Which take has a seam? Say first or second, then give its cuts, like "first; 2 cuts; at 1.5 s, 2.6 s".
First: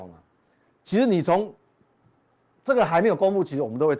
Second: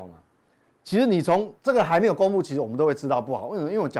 second; 1 cut; at 1.6 s